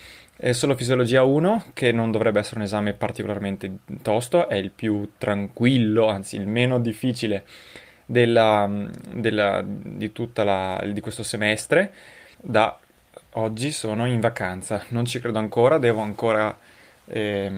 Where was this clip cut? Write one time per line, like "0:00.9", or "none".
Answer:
0:12.3